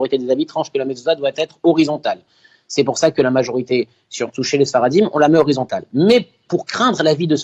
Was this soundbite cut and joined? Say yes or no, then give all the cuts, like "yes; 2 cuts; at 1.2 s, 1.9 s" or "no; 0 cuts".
no; 0 cuts